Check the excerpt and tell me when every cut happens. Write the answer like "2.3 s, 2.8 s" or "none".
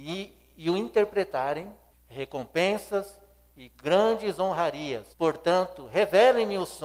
1.9 s, 5.1 s

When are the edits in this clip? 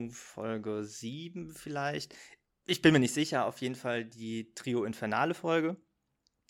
none

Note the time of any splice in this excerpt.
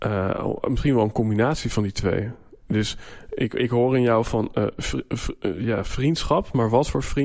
none

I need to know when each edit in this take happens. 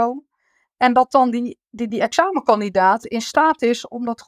1.9 s

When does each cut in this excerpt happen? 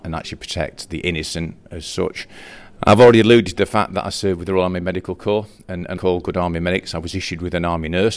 2.8 s, 6.0 s

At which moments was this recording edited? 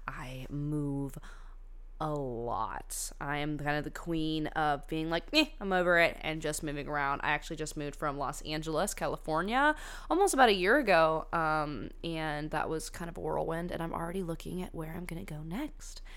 none

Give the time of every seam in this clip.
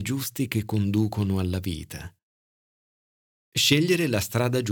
3.4 s

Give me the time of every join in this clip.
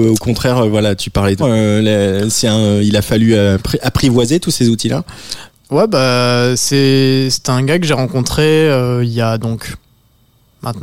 1.4 s, 5.5 s

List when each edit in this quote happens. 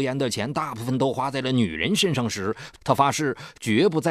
2.8 s

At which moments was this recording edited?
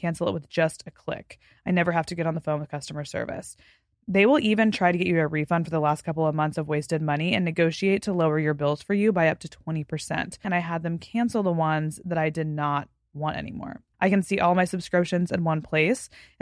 10.4 s, 13.9 s

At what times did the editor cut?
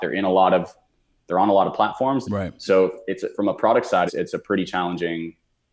2.2 s, 4.1 s

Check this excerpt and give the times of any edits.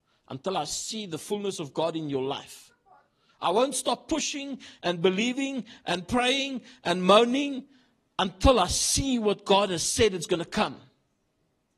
none

